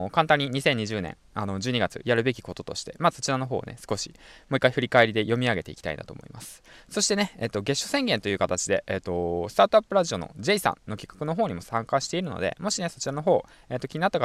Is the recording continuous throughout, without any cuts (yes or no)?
no